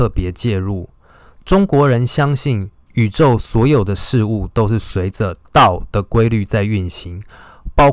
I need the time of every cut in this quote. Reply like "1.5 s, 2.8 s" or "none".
none